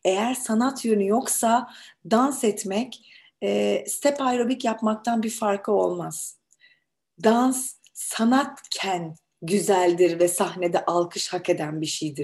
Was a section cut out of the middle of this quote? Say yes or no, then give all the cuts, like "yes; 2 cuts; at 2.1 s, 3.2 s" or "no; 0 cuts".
no; 0 cuts